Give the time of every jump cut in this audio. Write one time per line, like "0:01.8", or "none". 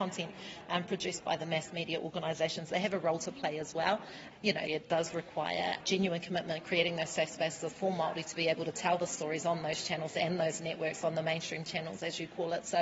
0:04.7